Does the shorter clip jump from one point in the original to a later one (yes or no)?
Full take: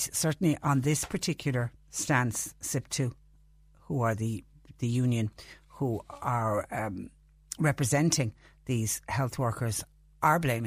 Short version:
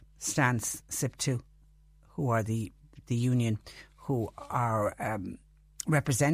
no